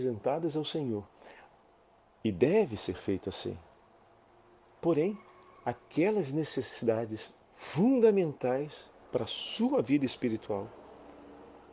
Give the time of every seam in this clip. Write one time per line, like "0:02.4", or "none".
none